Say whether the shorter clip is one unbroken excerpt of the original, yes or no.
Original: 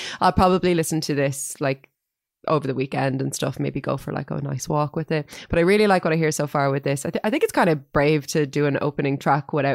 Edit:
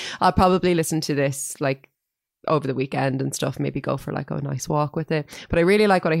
yes